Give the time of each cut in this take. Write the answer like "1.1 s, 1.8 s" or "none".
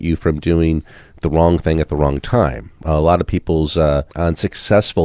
4.1 s